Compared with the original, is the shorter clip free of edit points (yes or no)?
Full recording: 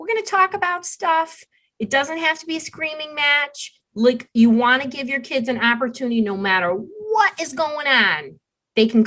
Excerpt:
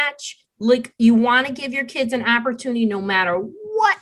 yes